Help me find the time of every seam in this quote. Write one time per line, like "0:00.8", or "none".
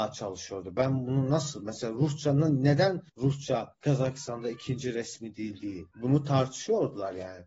none